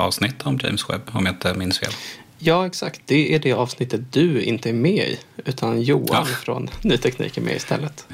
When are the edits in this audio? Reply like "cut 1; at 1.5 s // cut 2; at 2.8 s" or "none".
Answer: none